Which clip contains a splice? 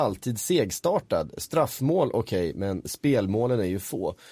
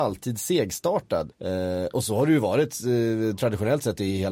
second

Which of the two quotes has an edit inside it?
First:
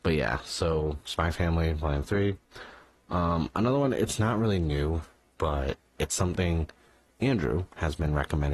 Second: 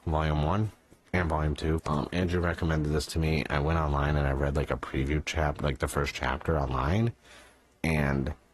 second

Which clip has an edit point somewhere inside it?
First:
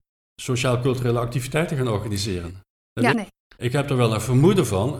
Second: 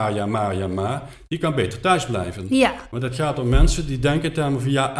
first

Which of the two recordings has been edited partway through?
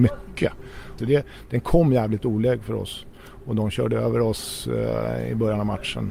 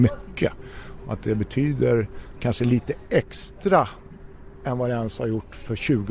first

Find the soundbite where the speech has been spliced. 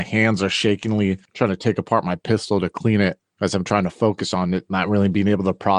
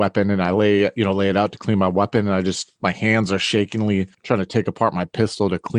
first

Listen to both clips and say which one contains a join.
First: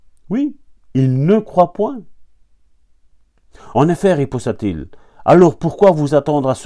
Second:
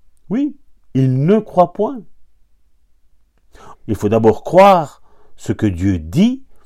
second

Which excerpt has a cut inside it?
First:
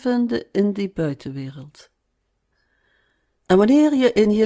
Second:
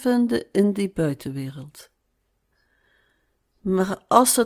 first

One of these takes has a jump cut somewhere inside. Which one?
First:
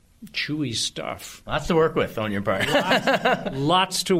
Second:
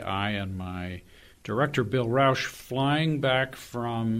first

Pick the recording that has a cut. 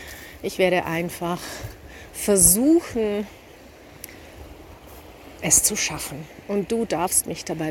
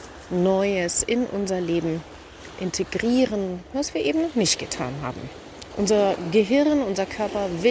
second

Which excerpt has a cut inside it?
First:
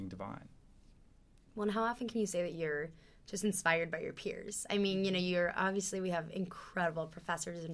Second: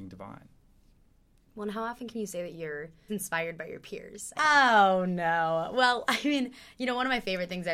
second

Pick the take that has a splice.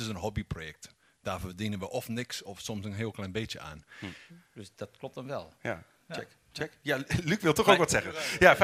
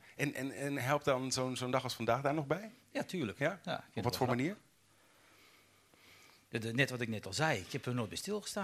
first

